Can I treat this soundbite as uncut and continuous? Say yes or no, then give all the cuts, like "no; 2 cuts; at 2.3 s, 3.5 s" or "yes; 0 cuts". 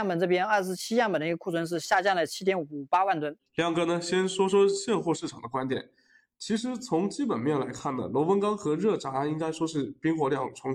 no; 1 cut; at 3.4 s